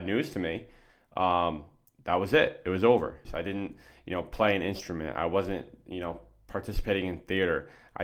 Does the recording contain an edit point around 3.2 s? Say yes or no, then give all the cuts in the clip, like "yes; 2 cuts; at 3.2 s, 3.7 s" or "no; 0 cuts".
yes; 1 cut; at 3.2 s